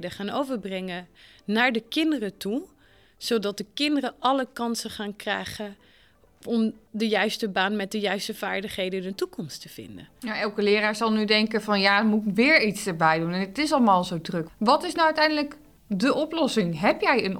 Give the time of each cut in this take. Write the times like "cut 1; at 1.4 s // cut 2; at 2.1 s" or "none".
cut 1; at 14.5 s